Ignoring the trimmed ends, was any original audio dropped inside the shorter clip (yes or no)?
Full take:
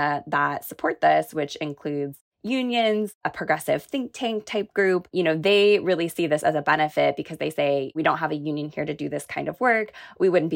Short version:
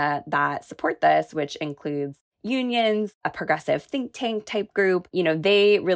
no